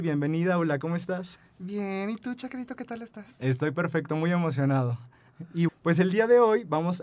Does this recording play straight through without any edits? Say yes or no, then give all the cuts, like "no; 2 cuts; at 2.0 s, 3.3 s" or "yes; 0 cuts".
no; 1 cut; at 5.7 s